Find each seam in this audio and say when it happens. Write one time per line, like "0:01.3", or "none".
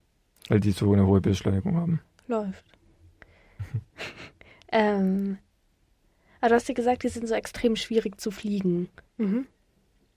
0:09.1

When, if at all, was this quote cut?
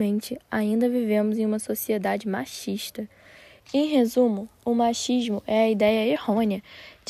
0:03.6

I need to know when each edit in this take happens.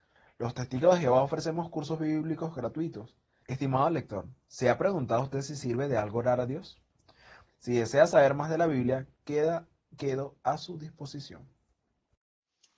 0:03.4
0:07.5

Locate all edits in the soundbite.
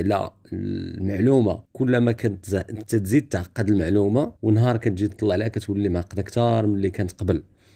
0:01.6
0:04.4

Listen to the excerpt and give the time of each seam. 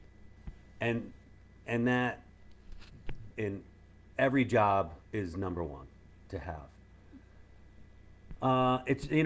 0:03.3
0:05.0

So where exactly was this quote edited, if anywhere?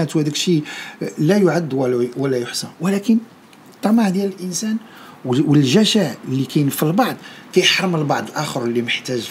0:06.2

